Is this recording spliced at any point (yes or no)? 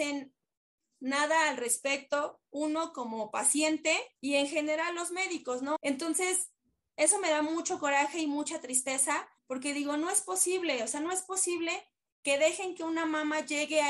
yes